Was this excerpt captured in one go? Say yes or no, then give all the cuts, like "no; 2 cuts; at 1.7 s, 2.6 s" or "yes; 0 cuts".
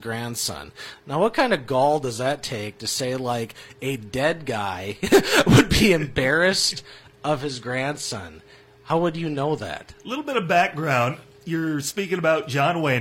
yes; 0 cuts